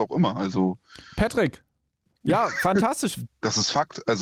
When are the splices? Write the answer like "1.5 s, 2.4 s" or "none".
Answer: 2.2 s, 3.3 s